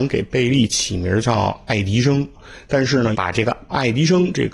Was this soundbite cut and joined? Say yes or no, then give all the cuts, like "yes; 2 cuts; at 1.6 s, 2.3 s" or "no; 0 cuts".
yes; 1 cut; at 3.1 s